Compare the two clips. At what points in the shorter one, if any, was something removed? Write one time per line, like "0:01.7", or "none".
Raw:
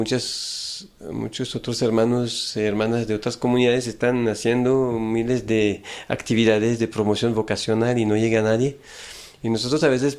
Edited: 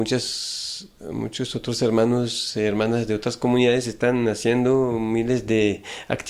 none